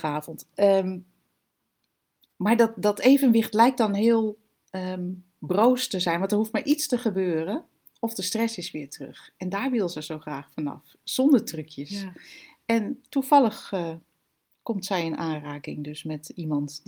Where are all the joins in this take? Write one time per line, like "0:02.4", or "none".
none